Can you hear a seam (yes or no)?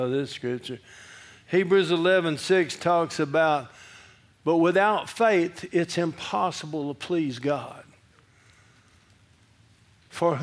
no